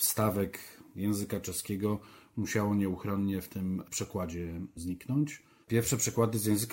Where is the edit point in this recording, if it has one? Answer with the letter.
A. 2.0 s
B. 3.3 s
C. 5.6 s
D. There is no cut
C